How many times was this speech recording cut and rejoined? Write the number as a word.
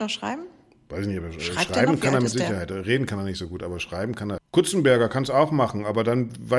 one